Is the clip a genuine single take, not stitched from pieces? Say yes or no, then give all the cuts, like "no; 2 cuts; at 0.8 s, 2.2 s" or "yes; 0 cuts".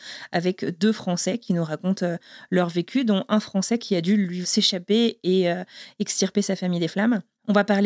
no; 1 cut; at 4.4 s